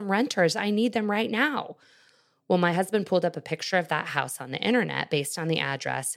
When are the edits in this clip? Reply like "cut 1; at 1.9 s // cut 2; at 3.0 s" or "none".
none